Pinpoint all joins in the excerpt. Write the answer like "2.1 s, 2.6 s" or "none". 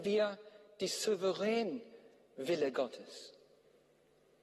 none